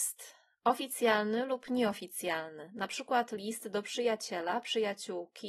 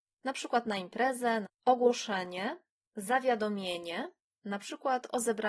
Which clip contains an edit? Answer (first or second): second